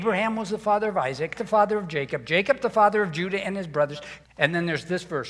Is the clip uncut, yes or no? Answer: no